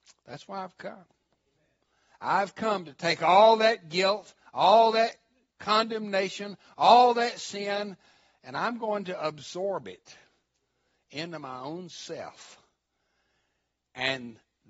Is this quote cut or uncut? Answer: uncut